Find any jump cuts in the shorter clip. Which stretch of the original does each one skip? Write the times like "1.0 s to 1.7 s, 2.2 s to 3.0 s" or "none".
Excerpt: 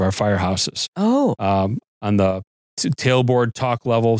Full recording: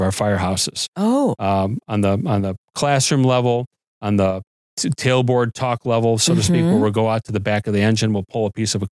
1.8 s to 3.8 s

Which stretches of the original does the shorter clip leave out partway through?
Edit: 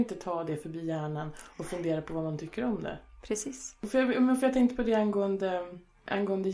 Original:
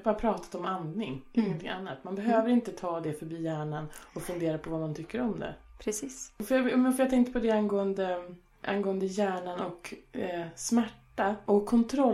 none

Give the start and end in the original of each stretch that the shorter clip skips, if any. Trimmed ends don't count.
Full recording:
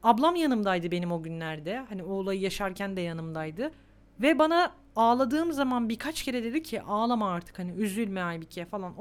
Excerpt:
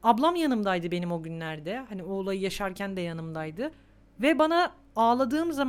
none

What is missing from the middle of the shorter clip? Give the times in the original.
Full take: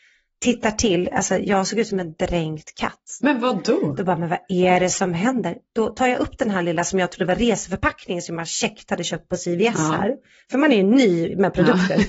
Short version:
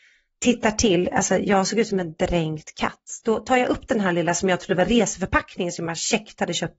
3.2 s to 5.7 s

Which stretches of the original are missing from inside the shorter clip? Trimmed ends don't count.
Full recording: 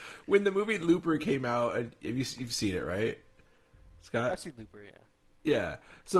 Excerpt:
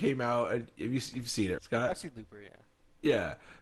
2.8 s to 4.0 s

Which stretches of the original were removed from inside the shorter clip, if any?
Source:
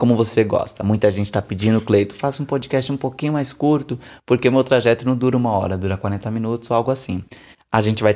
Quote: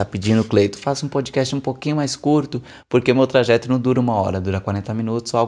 none

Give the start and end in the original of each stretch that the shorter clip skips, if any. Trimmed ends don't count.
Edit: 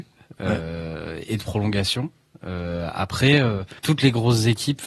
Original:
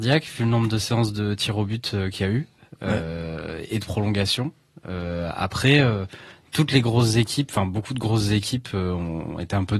6.2 s to 6.5 s

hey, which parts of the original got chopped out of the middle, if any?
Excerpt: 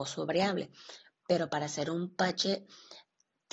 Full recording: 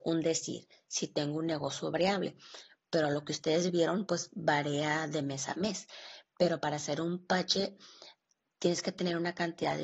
2.8 s to 6.3 s

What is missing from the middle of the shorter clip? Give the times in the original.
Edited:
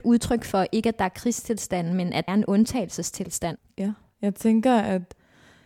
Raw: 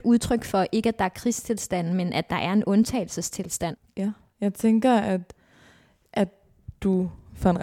2.3 s to 2.5 s

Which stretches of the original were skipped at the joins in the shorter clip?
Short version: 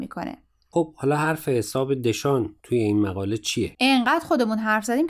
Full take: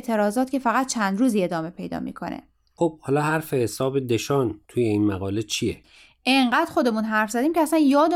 5.8 s to 6.2 s

